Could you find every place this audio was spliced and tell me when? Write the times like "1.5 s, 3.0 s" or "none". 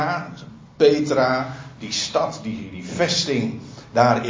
none